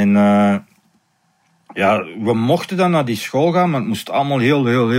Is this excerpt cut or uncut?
uncut